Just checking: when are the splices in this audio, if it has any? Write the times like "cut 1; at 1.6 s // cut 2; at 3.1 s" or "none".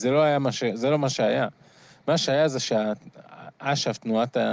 none